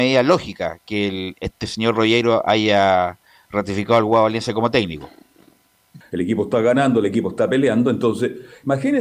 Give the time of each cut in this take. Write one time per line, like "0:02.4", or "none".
0:06.0